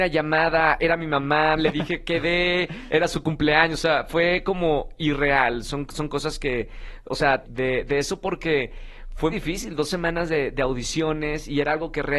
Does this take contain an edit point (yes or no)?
yes